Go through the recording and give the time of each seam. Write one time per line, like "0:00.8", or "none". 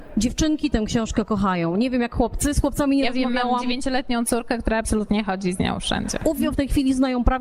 0:06.5